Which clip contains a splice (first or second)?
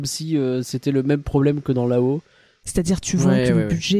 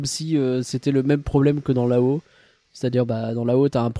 first